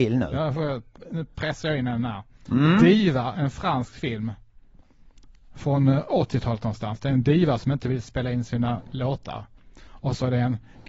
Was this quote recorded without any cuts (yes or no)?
yes